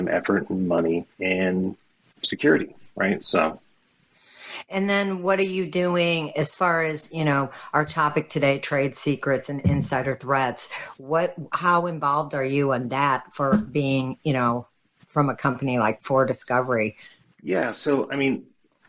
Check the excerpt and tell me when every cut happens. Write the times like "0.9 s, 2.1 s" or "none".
1.1 s, 3.2 s